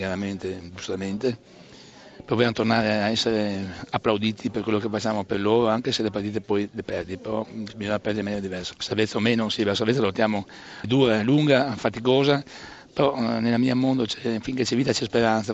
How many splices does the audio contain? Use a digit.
2